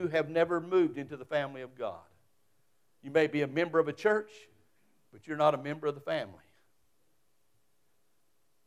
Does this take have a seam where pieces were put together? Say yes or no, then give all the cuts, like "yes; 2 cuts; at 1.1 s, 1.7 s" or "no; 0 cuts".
no; 0 cuts